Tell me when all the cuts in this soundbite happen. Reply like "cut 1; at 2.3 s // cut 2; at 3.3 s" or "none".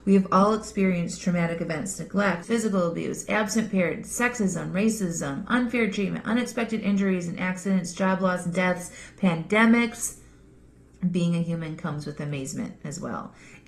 cut 1; at 2.4 s // cut 2; at 10.9 s